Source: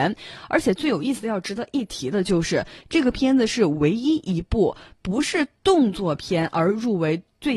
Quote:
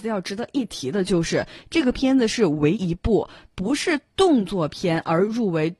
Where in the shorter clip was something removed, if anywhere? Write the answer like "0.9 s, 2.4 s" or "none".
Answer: 2.7 s

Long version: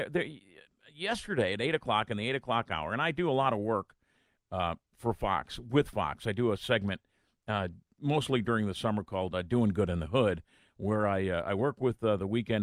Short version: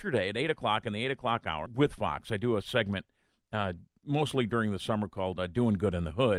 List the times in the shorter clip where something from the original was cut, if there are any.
1.7 s

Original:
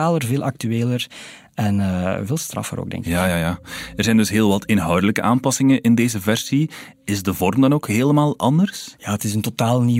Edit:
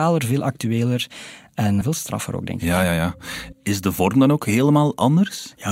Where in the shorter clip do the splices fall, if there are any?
1.8 s, 3.5 s

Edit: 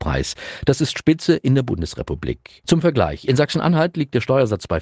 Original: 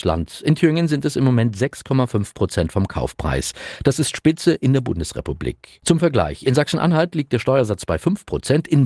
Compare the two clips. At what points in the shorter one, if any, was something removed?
none

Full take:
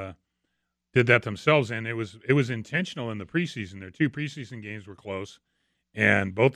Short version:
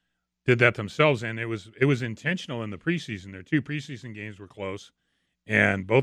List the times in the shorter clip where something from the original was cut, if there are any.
none

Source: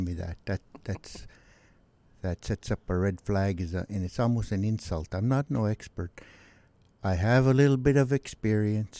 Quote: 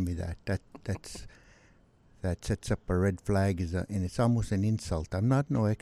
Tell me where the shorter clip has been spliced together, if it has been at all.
none

